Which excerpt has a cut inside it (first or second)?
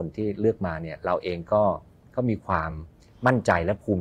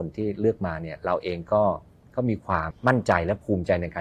second